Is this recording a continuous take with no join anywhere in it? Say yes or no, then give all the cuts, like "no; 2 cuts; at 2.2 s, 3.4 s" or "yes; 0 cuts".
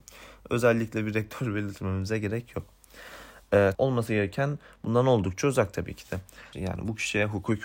no; 2 cuts; at 3.7 s, 6.5 s